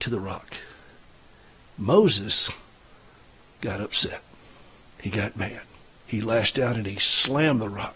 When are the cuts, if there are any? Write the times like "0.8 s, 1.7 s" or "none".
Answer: none